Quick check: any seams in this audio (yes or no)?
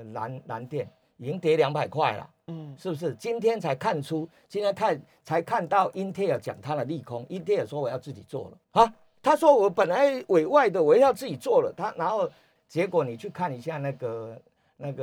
yes